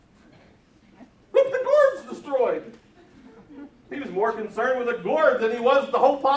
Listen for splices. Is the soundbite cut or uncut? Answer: uncut